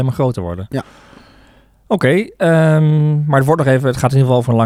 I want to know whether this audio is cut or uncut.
uncut